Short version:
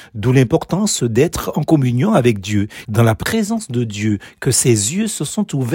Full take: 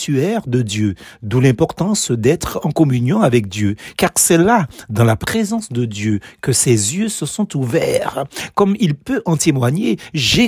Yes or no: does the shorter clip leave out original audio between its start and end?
yes